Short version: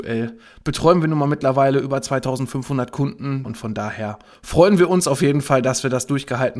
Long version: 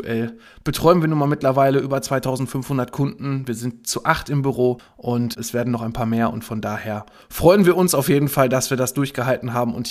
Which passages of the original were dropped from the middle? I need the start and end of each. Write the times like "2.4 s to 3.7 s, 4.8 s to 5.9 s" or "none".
3.4 s to 6.3 s